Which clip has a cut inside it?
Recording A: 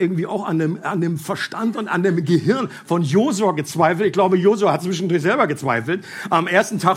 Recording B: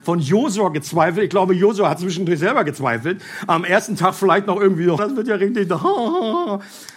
B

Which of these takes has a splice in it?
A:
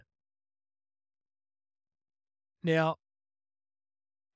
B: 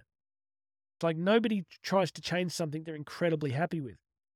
B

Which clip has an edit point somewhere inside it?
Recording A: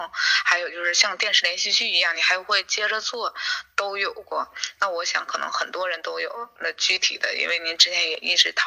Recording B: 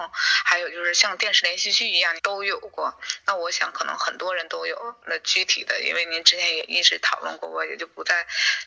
B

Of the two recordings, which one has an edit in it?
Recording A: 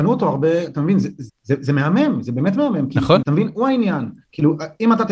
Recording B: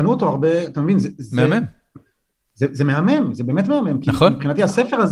A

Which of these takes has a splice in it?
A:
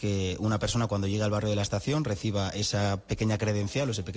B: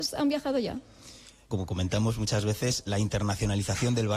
B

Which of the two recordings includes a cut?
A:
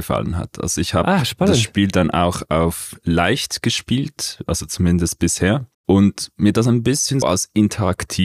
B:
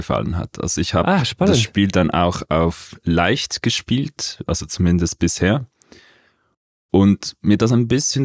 A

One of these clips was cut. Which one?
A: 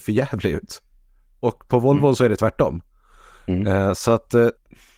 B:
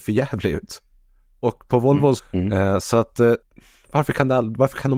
B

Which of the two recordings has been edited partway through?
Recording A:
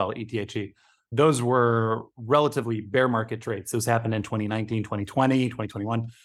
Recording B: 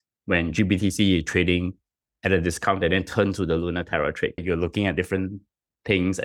B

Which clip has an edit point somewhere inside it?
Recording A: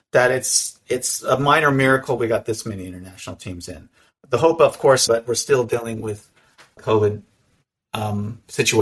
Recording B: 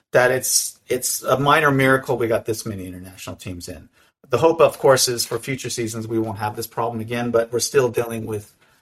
A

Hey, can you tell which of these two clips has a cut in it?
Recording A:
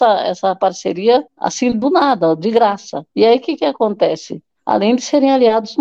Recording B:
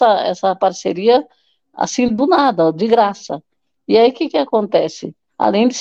A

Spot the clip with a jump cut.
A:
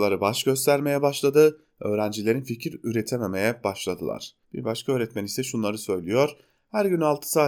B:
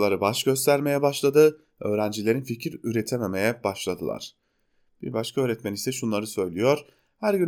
A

